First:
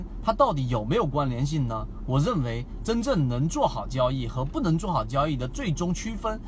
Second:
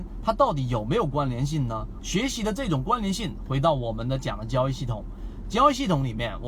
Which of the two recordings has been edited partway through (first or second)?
second